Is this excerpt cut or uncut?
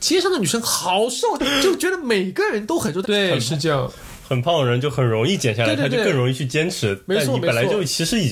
cut